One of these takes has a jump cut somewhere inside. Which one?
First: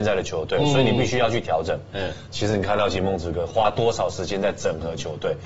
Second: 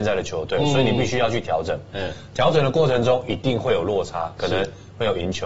first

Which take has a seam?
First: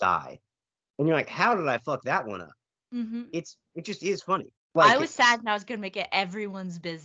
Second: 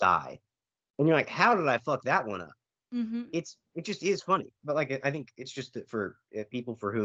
first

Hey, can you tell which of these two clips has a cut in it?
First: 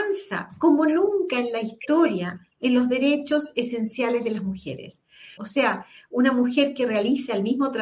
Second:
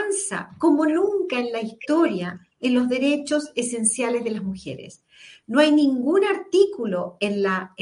first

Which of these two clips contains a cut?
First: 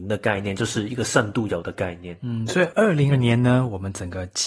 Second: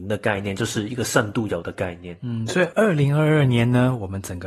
first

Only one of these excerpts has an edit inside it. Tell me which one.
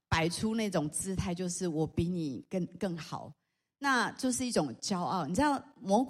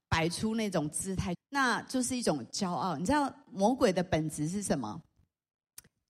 second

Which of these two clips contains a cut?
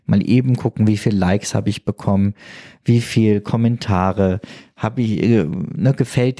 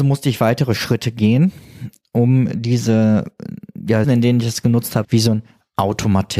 second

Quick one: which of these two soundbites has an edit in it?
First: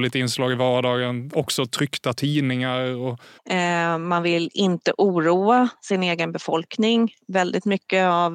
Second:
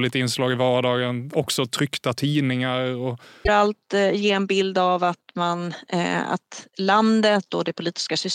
first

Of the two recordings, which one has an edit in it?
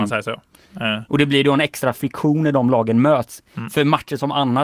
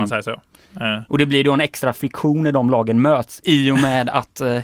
second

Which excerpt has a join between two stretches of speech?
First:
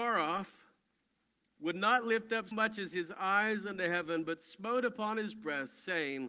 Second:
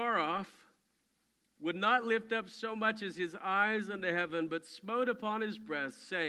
first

